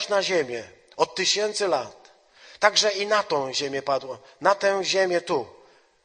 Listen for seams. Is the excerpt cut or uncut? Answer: uncut